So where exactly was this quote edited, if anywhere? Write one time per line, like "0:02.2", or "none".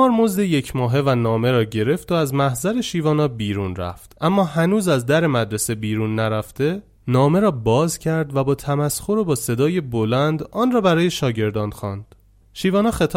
none